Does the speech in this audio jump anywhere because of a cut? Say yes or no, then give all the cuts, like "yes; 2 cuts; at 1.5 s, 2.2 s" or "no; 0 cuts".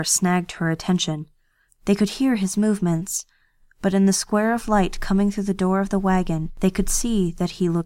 yes; 1 cut; at 1.7 s